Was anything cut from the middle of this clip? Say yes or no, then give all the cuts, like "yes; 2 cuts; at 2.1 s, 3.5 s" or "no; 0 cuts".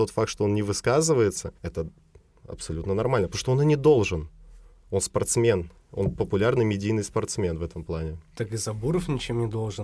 yes; 1 cut; at 1.6 s